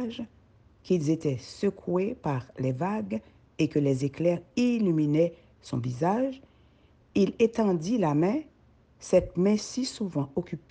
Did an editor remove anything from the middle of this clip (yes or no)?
no